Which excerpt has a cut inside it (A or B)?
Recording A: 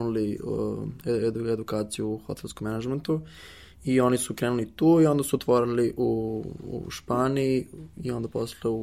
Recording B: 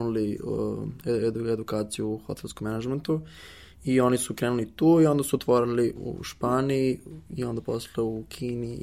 B